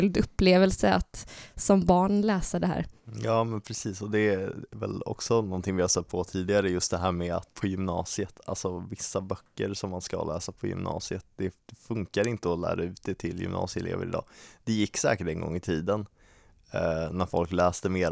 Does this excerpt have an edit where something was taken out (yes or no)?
yes